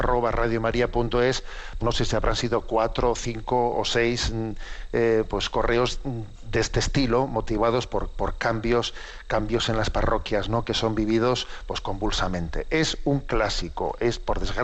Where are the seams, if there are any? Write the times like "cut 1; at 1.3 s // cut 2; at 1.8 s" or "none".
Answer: cut 1; at 1.8 s